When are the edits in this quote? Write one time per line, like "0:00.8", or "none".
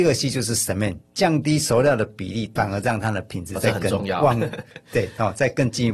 0:01.0
0:02.6